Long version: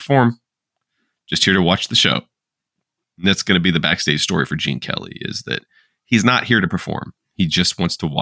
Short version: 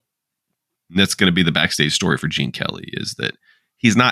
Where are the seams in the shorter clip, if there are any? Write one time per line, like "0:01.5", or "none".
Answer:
none